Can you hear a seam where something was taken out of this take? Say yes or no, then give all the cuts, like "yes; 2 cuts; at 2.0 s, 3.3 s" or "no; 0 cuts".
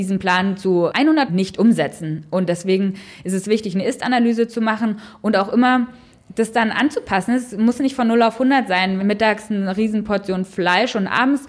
yes; 2 cuts; at 1.3 s, 9.0 s